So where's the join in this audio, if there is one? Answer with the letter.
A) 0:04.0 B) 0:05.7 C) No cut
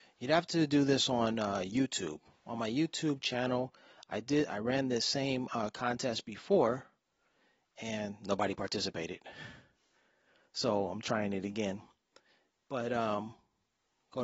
C